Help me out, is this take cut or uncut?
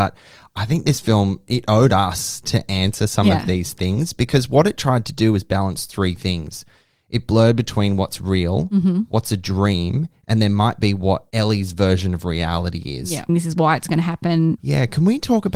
cut